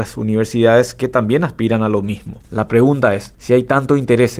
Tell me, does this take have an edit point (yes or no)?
yes